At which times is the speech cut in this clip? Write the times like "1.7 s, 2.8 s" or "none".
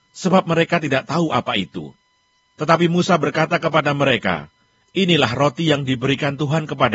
none